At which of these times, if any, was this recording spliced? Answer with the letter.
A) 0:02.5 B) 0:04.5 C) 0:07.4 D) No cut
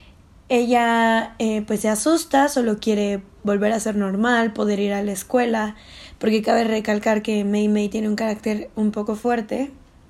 D